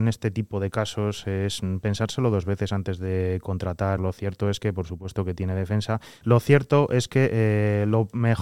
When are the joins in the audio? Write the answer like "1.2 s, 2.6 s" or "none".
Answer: 4.0 s, 6.2 s